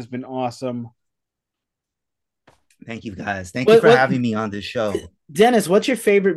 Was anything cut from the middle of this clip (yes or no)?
no